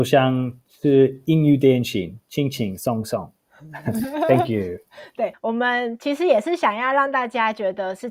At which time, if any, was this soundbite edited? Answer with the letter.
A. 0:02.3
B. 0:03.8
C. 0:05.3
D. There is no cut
C